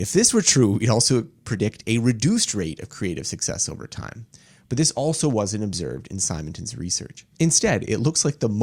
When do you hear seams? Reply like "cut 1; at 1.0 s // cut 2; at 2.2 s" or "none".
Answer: cut 1; at 7.3 s